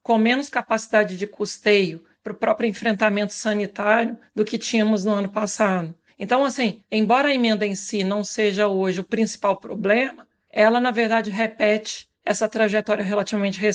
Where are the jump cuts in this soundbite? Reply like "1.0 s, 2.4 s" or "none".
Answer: none